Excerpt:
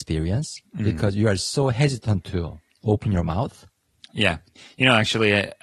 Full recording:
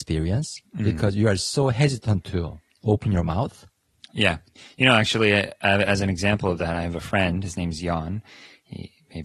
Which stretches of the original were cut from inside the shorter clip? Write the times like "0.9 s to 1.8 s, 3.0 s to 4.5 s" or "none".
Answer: none